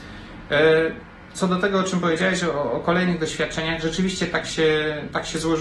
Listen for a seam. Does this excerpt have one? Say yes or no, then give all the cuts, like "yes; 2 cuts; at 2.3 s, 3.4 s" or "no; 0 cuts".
no; 0 cuts